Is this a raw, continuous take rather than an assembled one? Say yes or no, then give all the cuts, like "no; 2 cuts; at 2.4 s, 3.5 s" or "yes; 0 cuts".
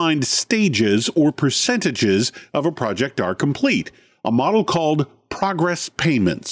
yes; 0 cuts